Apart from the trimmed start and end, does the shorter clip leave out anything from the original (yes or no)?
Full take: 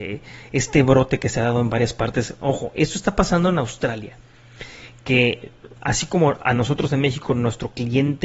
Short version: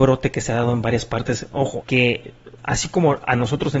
yes